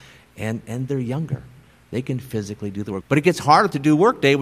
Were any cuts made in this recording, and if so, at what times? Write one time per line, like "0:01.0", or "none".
0:03.0